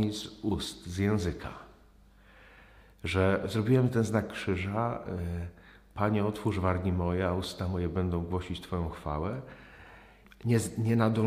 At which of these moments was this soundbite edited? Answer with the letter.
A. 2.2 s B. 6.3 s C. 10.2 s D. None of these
C